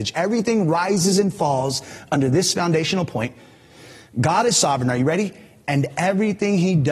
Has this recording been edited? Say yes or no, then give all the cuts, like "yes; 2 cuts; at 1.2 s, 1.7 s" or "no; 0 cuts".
no; 0 cuts